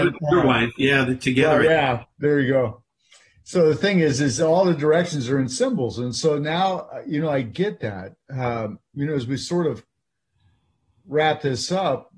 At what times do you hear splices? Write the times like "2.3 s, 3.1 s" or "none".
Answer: none